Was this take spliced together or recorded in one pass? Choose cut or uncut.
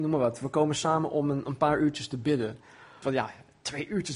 cut